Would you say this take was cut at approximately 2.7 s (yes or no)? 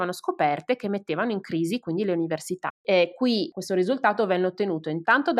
yes